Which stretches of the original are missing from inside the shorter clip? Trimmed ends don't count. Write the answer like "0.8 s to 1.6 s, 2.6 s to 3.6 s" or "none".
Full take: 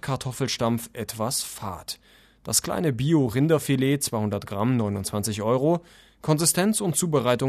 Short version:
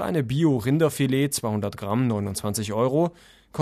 none